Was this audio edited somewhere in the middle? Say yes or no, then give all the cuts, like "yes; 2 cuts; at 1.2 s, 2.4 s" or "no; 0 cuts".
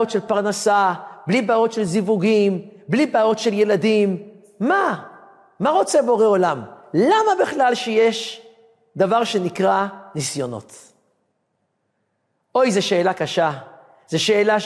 no; 0 cuts